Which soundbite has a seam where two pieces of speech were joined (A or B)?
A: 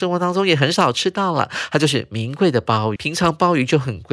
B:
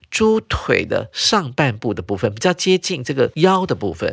A